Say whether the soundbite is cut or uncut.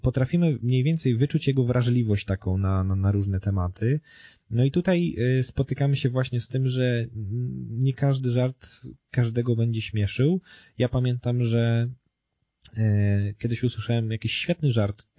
uncut